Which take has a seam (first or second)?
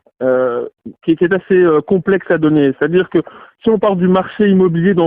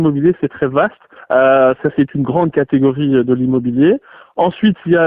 second